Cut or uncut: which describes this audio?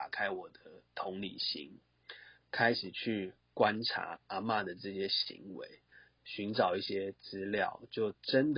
cut